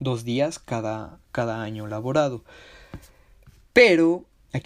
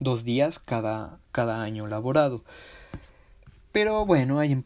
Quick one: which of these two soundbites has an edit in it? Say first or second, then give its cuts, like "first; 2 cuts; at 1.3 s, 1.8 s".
first; 1 cut; at 3.6 s